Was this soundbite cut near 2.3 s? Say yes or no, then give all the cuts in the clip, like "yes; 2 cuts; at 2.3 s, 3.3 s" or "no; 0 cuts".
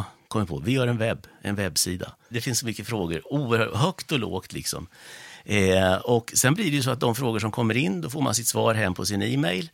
yes; 1 cut; at 2.3 s